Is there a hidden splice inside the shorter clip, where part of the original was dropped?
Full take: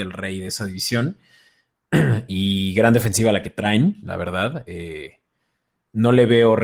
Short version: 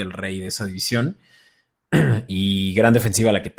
no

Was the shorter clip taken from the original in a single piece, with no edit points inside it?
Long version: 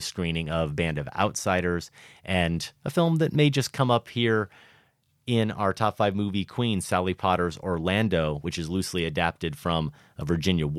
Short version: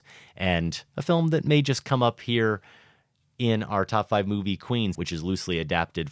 no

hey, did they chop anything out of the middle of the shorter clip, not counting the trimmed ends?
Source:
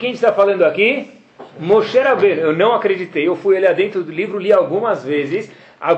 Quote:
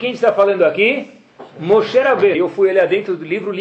yes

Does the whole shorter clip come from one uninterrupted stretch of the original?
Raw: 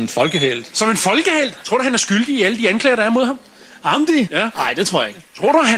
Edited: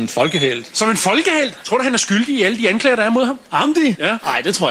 no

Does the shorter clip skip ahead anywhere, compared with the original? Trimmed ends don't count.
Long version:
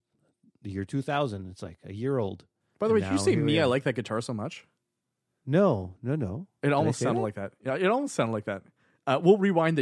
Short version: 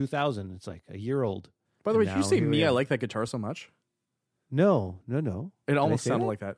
no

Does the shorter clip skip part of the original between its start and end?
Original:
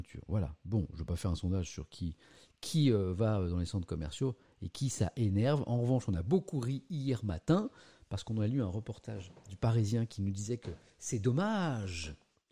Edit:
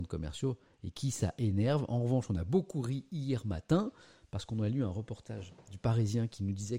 no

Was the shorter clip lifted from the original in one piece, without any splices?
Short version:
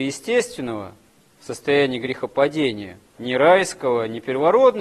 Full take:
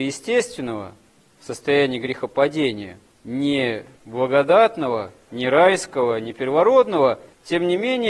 no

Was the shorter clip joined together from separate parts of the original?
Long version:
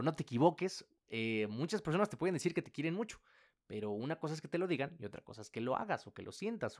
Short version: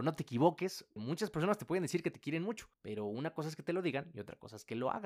yes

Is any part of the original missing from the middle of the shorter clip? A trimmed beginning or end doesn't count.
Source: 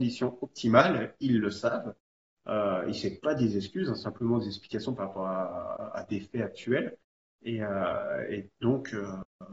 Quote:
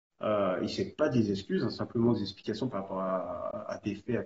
no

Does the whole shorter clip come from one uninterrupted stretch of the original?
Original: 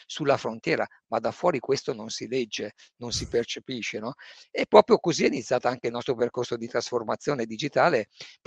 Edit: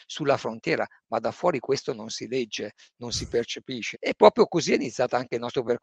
no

